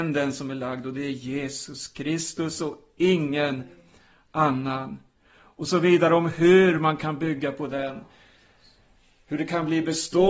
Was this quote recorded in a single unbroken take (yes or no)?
yes